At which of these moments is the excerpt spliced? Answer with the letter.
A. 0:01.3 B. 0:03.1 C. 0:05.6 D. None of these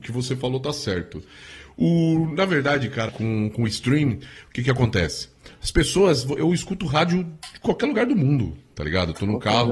B